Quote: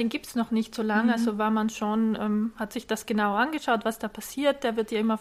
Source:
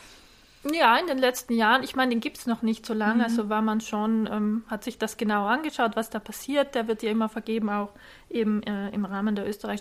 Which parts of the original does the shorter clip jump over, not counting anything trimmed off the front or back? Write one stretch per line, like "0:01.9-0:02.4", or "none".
none